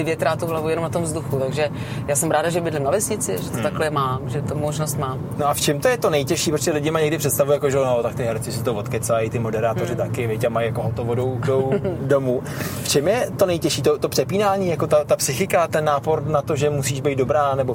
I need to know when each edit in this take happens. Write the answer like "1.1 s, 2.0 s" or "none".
16.2 s